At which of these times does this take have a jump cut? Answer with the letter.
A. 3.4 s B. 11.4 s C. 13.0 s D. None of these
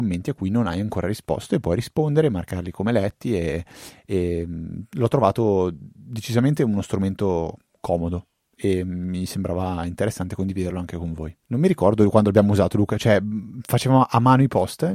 B